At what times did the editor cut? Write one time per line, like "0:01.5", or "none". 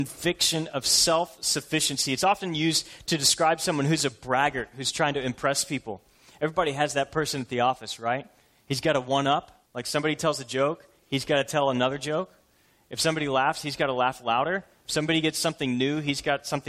0:09.7